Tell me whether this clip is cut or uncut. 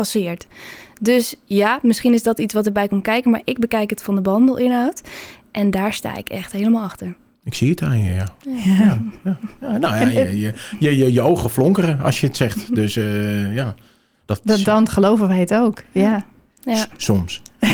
uncut